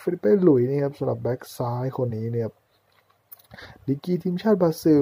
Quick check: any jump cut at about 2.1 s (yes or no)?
yes